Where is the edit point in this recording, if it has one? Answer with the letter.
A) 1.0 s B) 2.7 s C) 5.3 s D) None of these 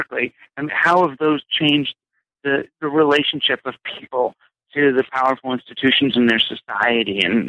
B